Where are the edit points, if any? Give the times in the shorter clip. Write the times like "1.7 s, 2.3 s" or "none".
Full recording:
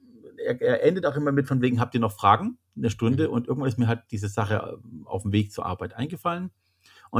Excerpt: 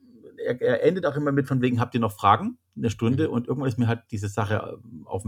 none